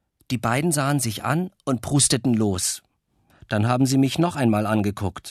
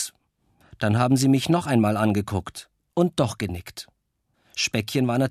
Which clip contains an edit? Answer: second; 1 cut; at 4.3 s

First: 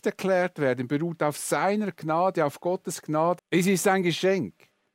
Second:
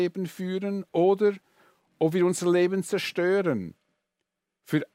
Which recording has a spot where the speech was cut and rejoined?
first; 1 cut; at 3.4 s

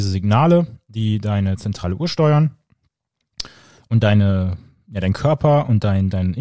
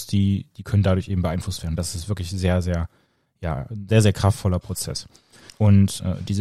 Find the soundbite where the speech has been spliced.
second; 1 cut; at 5.5 s

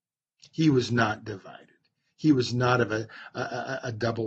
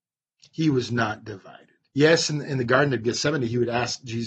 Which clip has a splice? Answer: second; 1 cut; at 1.9 s

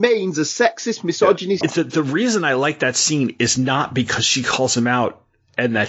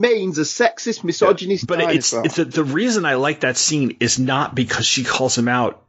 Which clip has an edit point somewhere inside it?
first; 1 cut; at 1.6 s

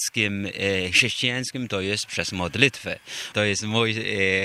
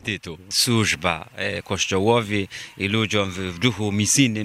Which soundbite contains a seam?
first; 1 cut; at 3.3 s

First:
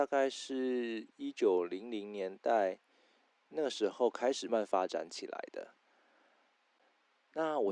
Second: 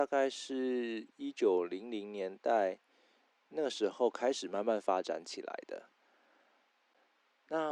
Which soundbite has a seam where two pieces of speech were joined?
first; 1 cut; at 4.5 s

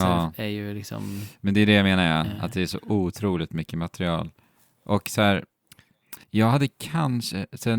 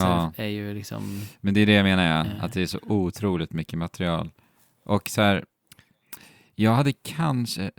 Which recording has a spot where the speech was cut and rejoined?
first; 1 cut; at 6.2 s

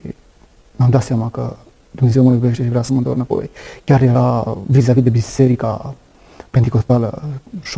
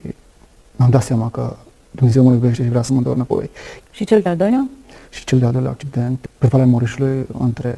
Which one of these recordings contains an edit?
second; 1 cut; at 3.8 s

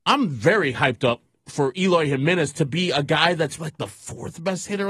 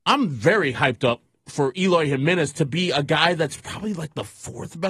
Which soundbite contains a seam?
first; 1 cut; at 3.6 s

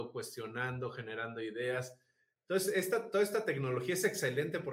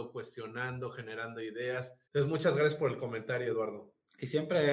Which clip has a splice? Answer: second; 1 cut; at 2.1 s

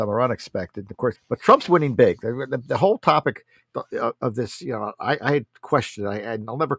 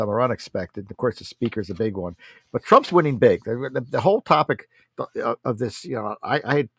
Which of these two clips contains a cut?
first; 1 cut; at 1.1 s

